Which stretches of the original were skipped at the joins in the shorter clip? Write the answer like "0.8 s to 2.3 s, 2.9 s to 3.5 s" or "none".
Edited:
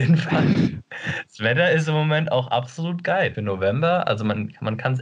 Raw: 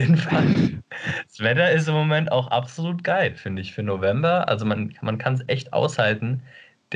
3.3 s to 3.8 s